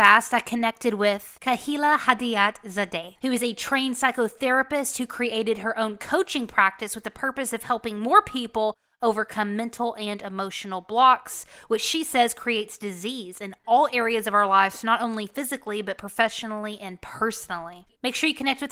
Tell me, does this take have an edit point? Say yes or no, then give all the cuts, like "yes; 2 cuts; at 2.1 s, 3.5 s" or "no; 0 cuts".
no; 0 cuts